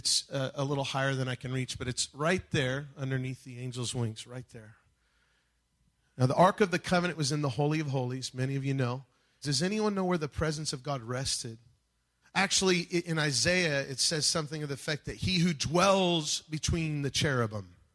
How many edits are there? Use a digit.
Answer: 2